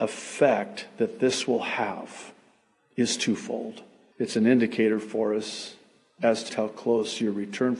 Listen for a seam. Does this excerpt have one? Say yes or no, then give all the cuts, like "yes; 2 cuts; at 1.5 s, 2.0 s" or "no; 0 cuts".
yes; 2 cuts; at 4.1 s, 6.5 s